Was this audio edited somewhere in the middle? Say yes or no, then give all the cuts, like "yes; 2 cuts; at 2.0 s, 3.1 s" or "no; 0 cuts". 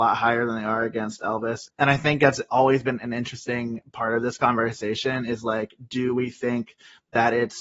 yes; 1 cut; at 1.7 s